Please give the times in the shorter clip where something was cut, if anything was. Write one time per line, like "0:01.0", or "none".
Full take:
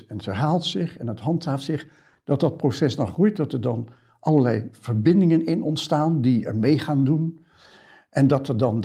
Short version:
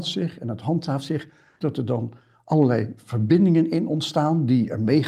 0:01.6